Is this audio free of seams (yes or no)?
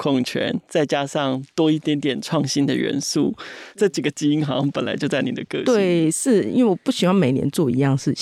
no